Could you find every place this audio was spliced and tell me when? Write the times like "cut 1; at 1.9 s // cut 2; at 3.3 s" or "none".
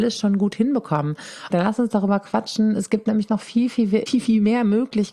cut 1; at 1.5 s // cut 2; at 4.1 s